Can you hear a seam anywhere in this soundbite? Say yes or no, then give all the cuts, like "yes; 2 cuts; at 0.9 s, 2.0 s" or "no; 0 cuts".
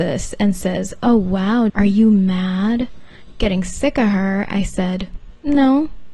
yes; 1 cut; at 1.7 s